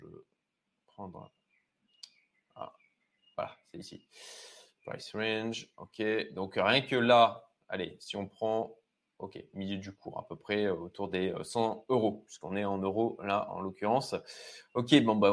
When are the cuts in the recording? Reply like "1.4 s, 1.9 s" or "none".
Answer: none